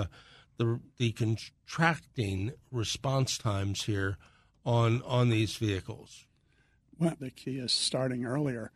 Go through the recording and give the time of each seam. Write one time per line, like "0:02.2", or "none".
0:07.2